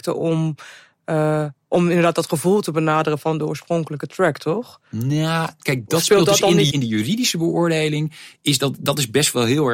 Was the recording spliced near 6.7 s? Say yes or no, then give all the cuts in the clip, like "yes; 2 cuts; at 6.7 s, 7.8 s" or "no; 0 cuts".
yes; 1 cut; at 6.7 s